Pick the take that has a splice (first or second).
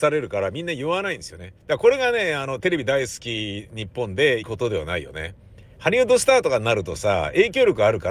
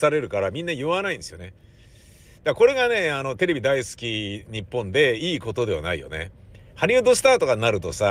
first